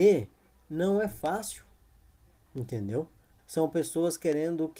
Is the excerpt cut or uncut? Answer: cut